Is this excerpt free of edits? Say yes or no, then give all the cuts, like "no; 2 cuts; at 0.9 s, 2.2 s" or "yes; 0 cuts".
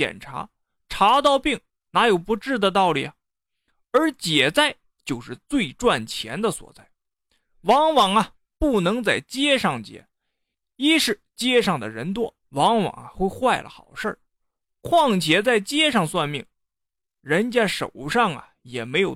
no; 1 cut; at 12.4 s